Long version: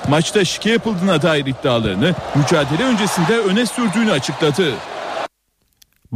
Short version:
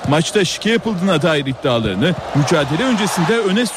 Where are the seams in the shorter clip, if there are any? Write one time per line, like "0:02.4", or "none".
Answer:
none